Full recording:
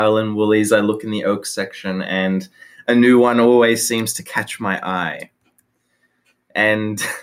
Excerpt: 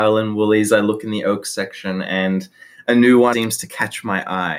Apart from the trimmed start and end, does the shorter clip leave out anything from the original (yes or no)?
yes